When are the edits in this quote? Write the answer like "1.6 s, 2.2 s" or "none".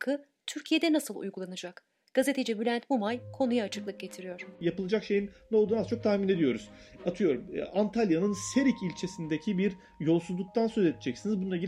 none